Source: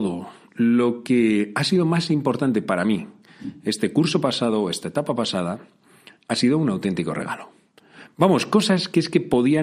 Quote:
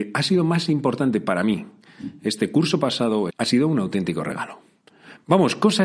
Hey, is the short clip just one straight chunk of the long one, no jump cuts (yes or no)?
no